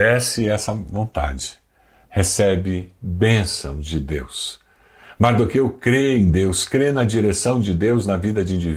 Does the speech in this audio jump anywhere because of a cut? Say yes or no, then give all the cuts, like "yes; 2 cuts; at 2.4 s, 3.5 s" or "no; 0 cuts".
no; 0 cuts